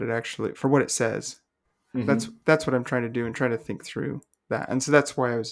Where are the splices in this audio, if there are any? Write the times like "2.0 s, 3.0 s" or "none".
none